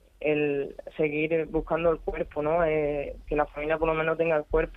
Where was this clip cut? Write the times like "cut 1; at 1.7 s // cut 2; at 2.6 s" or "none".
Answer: none